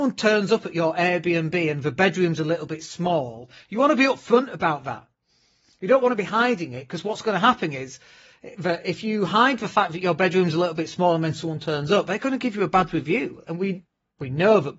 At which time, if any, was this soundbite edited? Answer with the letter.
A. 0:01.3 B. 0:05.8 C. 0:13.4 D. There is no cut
D